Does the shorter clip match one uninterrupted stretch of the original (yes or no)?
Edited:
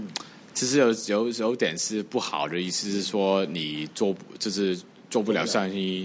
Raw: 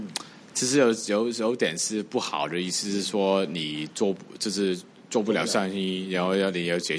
yes